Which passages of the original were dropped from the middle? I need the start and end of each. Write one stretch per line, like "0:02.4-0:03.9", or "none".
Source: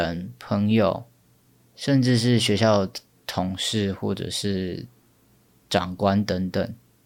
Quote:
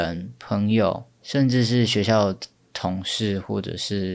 0:01.1-0:01.7